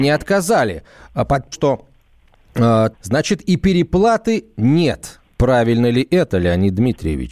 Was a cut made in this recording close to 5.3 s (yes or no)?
no